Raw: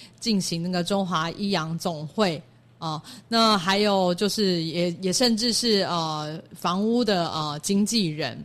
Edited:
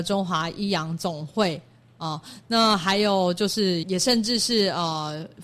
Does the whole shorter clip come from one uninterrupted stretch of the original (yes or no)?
no